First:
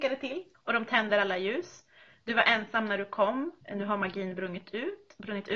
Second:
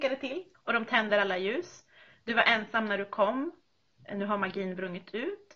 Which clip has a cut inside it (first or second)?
first